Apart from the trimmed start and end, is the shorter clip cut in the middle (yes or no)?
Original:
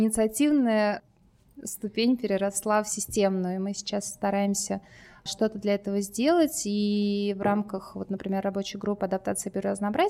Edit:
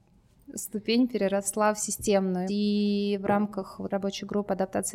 yes